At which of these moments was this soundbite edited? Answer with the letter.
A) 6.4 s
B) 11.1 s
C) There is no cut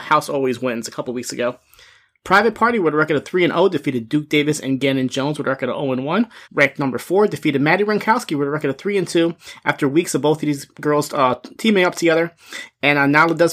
A